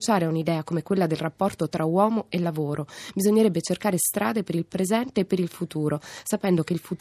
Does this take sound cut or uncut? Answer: uncut